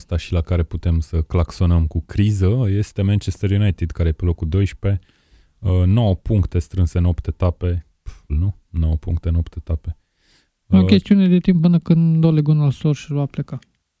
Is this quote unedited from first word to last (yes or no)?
no